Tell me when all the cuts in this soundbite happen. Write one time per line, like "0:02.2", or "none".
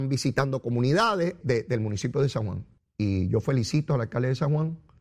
0:01.4
0:02.8